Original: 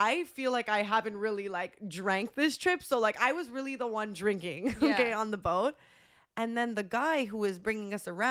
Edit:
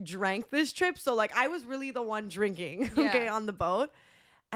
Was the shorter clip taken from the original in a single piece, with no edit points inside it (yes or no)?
yes